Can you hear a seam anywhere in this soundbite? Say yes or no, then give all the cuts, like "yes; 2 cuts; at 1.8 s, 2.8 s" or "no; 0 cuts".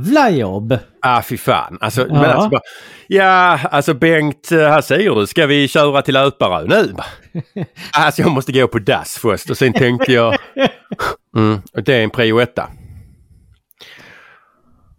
yes; 2 cuts; at 7.9 s, 11.2 s